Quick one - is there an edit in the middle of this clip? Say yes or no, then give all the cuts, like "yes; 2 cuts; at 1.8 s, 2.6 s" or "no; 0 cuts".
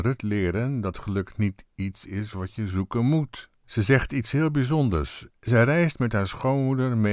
yes; 2 cuts; at 3.5 s, 5.3 s